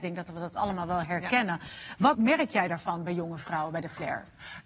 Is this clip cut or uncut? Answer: cut